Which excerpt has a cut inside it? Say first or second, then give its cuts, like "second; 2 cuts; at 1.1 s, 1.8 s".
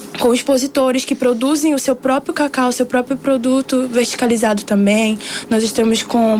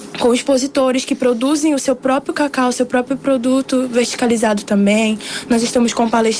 first; 1 cut; at 5.4 s